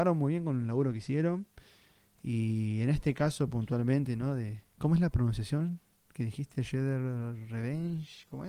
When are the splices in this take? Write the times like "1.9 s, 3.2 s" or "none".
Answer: none